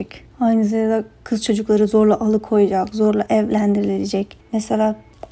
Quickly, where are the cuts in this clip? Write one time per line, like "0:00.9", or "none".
0:04.4